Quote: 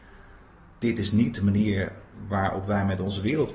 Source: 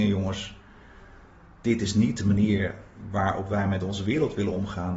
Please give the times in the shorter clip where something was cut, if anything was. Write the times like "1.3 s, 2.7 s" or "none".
none